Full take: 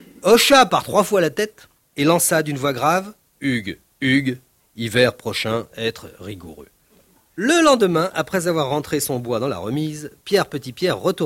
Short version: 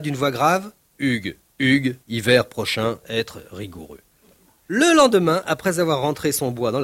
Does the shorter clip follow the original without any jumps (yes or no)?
no